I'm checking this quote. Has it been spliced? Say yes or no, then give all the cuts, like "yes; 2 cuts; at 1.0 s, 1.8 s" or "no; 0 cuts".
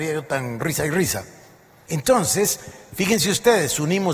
yes; 1 cut; at 1.9 s